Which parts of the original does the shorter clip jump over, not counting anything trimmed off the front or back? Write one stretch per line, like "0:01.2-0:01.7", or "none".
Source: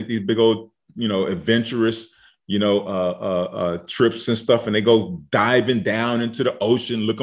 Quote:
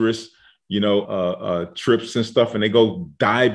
0:02.8-0:03.2

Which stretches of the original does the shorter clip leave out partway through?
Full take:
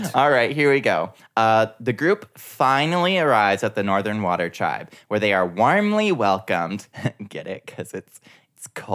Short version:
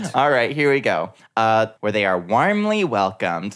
0:01.8-0:05.0

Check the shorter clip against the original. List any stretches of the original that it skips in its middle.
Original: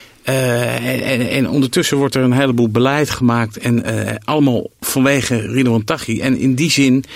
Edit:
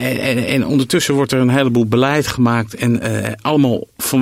none

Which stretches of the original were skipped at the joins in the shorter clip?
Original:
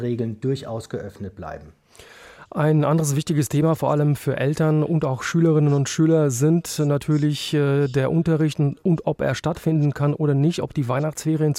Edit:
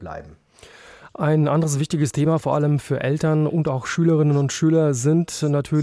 none

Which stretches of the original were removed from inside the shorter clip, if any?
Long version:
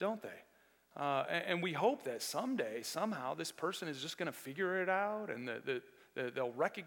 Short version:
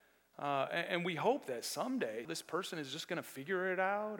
0:02.8-0:03.3

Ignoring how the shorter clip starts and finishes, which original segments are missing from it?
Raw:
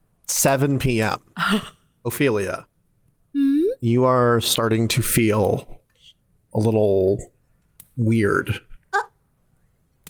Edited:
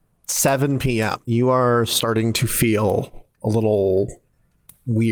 0:01.2-0:03.8
0:05.9-0:06.4

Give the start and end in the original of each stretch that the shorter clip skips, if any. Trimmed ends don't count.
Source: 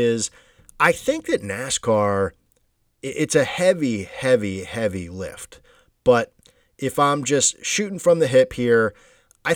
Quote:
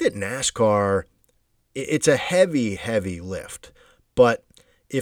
0:04.0-0:04.6

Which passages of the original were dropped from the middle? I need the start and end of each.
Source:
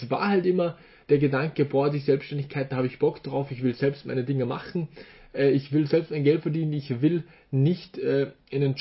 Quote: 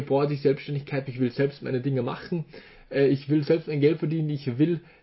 0:02.7-0:03.5

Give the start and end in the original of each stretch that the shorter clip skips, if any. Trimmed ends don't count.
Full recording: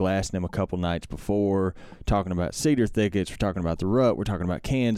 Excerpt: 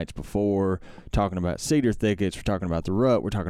none

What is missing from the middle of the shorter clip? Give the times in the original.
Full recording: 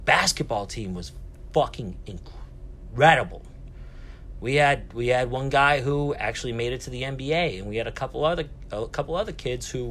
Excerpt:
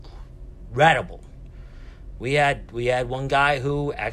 none

